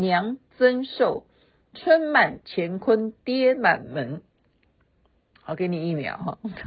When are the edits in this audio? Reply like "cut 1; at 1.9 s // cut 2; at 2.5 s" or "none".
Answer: none